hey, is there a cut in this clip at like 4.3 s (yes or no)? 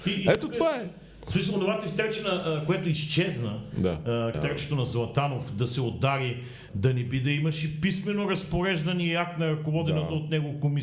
yes